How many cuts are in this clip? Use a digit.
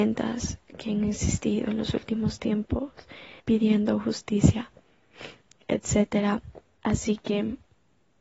2